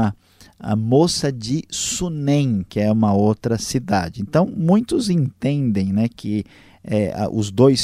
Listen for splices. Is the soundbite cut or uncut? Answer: uncut